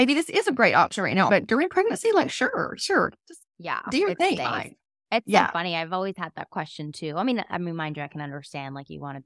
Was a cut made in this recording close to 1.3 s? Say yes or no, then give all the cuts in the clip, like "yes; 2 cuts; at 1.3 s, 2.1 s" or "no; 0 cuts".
yes; 2 cuts; at 1.3 s, 4.4 s